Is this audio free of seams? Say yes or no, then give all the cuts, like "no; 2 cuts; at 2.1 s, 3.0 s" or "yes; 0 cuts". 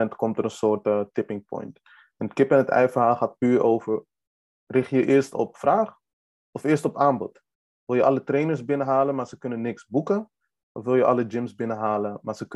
yes; 0 cuts